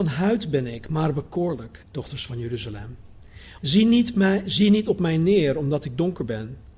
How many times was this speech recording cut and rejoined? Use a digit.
2